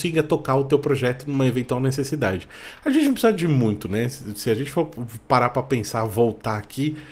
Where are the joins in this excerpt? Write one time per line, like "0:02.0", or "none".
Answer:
none

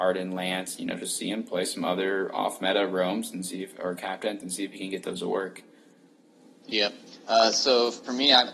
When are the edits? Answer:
none

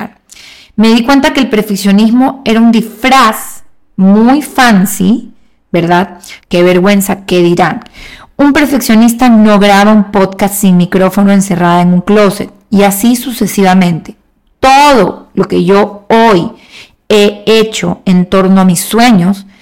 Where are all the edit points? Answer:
0:06.4

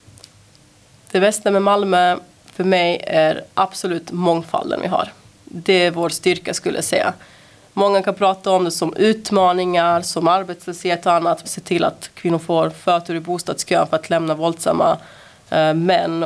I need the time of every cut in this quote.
0:03.5
0:10.0
0:11.4

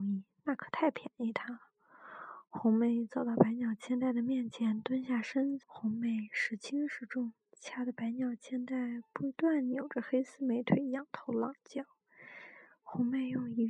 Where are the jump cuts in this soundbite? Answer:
0:05.6

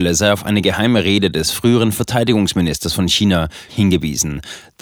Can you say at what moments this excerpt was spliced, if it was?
0:03.7

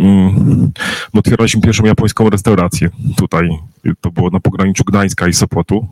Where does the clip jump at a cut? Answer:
none

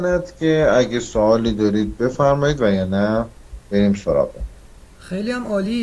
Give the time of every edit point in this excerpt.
0:04.9

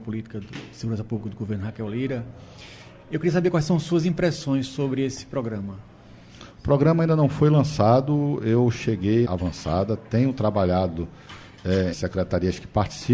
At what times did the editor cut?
0:09.2
0:11.9

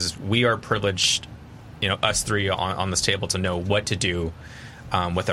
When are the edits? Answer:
none

